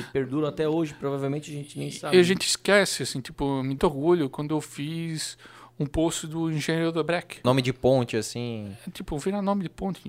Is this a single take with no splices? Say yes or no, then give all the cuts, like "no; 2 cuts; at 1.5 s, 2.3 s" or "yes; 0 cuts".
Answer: no; 2 cuts; at 3.8 s, 7.4 s